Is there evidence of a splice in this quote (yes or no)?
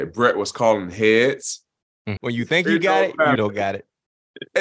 yes